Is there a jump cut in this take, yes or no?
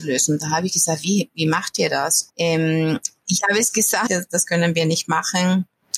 yes